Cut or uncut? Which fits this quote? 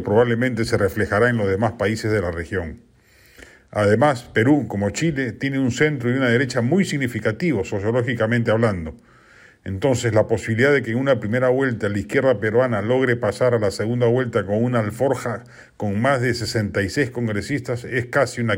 uncut